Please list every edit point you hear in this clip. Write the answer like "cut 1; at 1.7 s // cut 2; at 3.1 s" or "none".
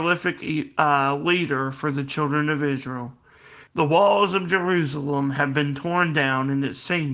cut 1; at 3.7 s